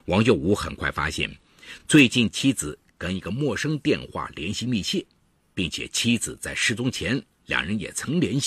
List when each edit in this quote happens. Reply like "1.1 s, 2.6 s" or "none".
none